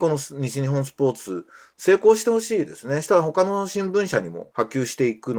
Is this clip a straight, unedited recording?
yes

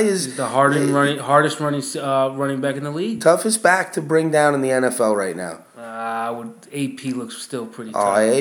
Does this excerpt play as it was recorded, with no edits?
yes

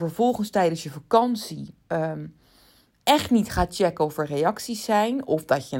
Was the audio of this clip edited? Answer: no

